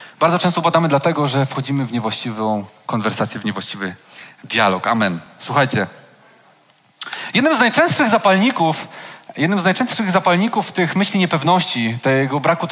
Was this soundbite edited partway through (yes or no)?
no